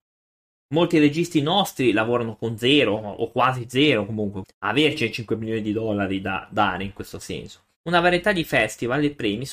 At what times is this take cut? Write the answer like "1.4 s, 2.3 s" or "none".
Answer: 4.4 s, 7.8 s